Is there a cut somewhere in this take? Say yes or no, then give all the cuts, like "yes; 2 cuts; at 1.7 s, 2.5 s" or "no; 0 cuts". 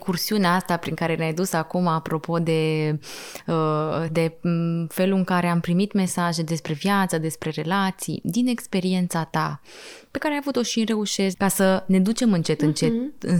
yes; 2 cuts; at 4.1 s, 11.3 s